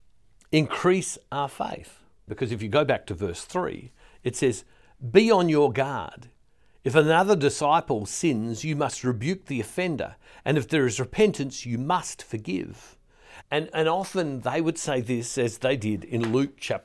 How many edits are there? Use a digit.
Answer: 2